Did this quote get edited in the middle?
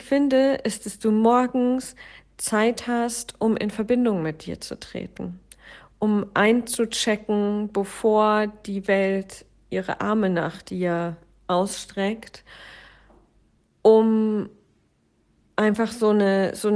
no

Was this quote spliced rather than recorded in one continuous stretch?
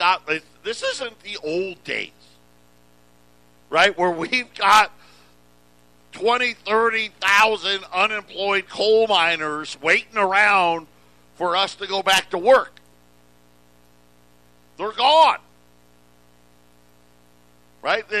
no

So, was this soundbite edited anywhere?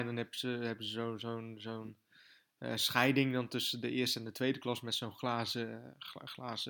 no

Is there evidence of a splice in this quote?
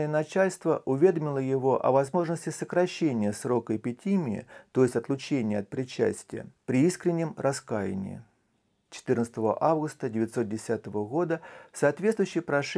no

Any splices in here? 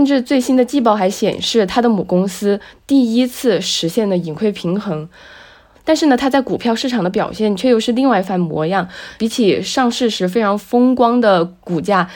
no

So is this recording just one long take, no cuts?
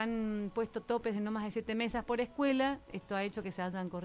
yes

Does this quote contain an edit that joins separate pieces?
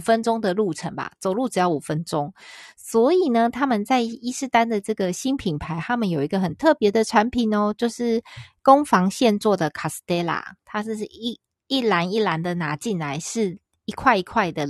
no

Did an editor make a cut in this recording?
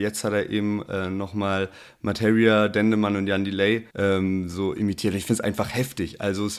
yes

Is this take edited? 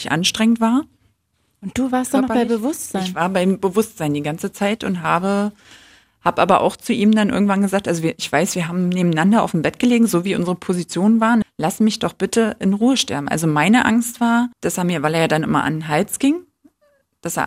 yes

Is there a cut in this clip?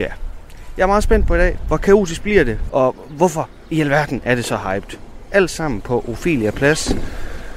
yes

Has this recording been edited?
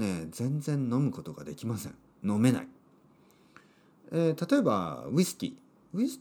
no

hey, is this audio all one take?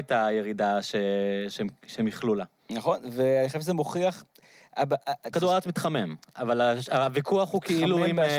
no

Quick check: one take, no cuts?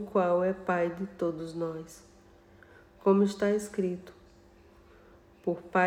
yes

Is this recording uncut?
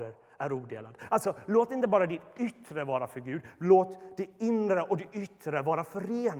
yes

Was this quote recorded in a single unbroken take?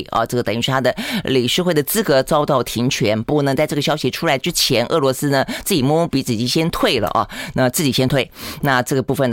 yes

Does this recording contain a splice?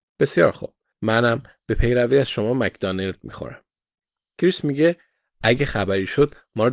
no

